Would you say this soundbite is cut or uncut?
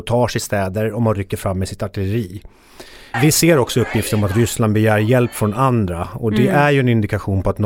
cut